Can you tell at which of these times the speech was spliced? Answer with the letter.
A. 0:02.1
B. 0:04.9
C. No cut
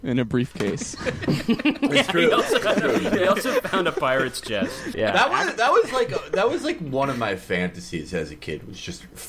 B